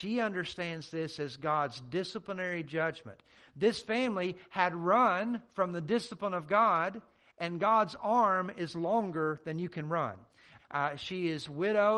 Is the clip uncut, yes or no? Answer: no